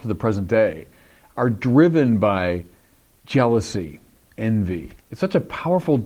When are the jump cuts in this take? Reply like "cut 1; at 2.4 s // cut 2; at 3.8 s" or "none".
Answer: cut 1; at 5.0 s